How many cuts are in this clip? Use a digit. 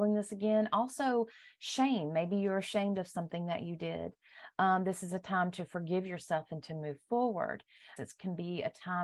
1